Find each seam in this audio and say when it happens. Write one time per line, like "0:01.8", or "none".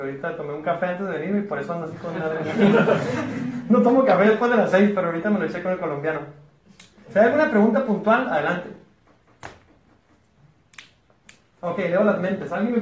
none

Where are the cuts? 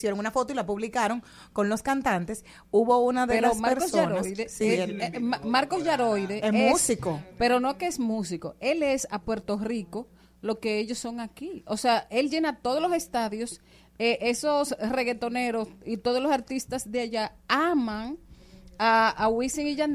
none

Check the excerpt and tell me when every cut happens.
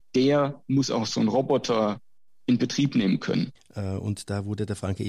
0:03.6

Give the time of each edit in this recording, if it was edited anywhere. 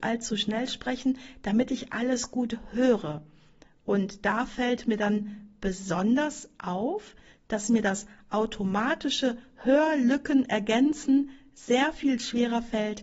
none

